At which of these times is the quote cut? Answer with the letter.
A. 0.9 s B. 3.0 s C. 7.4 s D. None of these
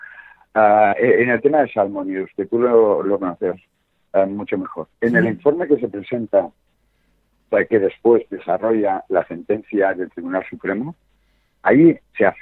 B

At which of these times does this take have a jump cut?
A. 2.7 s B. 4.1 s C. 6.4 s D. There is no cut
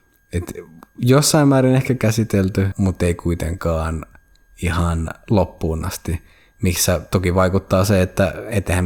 A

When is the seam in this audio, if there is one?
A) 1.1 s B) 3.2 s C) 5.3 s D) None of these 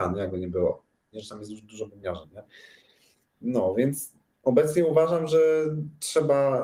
A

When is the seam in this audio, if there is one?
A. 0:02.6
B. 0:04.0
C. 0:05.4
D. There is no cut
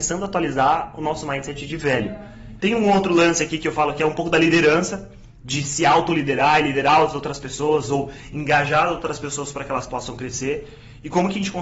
A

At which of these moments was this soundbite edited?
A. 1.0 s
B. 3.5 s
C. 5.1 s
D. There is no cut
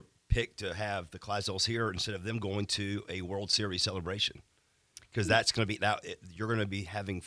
C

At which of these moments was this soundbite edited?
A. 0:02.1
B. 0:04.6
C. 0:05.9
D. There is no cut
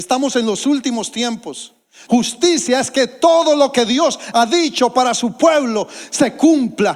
A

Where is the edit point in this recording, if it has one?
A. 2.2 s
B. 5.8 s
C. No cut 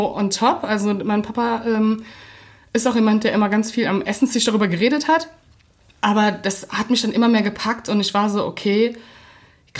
C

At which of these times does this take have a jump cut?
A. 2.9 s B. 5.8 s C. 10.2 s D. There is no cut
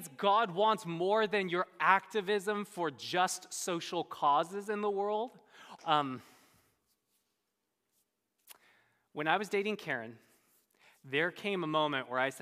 B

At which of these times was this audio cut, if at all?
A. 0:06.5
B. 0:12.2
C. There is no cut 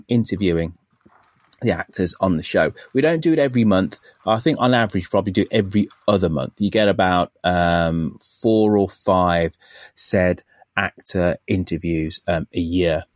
C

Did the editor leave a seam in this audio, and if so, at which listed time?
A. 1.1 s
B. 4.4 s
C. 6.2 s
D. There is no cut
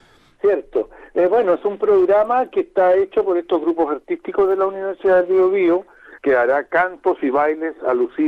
C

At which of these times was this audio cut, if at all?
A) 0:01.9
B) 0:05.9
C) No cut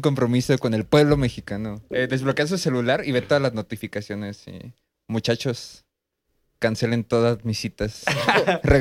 A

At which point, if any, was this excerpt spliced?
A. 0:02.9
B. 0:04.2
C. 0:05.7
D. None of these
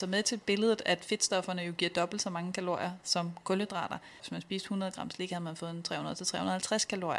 B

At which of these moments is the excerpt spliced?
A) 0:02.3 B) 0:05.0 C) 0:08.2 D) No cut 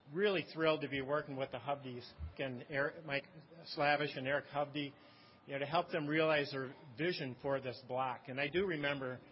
A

